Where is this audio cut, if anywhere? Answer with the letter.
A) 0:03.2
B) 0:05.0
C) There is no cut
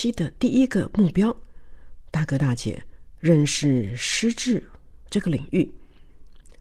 A